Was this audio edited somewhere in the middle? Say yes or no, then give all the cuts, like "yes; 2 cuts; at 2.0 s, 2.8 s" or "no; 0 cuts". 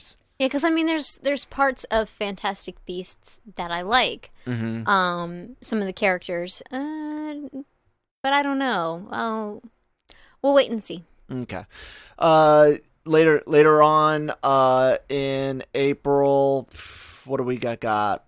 yes; 1 cut; at 6.6 s